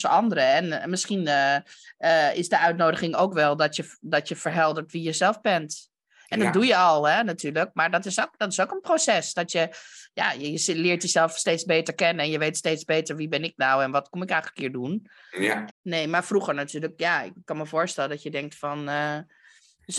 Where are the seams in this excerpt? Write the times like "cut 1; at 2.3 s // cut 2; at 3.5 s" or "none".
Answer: cut 1; at 15.7 s